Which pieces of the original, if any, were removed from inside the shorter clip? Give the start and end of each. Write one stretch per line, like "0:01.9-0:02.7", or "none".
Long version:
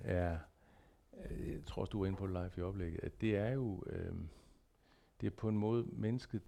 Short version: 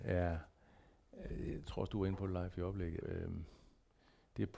0:03.0-0:03.8